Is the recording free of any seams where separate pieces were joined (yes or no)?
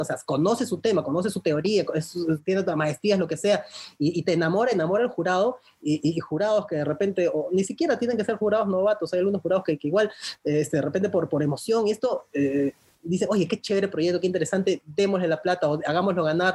yes